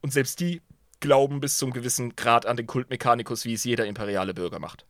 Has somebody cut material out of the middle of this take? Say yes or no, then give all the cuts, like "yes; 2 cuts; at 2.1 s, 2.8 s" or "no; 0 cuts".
no; 0 cuts